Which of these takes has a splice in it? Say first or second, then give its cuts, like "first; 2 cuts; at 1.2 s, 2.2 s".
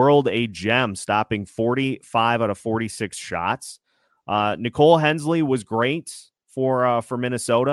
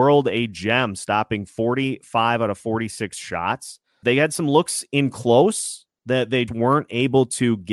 second; 2 cuts; at 4.0 s, 6.5 s